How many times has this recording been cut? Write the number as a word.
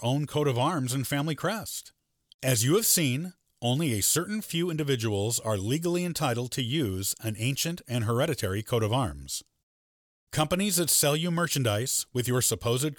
one